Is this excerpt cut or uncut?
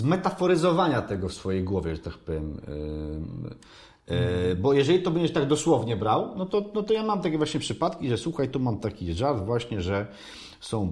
uncut